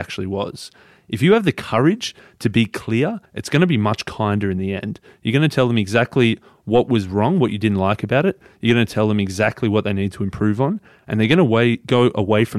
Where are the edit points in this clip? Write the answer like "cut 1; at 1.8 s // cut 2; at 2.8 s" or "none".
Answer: cut 1; at 3.3 s